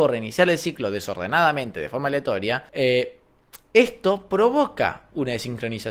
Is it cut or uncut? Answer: cut